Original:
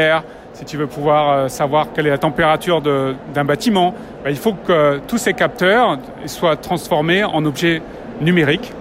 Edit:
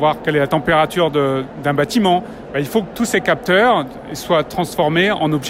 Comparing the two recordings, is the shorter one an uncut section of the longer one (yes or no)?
no